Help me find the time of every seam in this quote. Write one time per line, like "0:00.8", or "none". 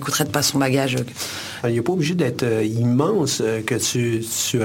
0:01.6